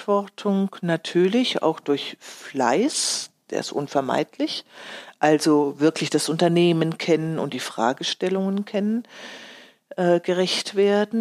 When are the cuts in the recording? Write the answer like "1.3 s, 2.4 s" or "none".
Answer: none